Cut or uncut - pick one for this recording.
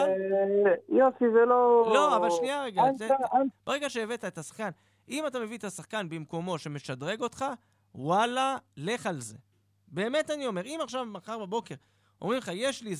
cut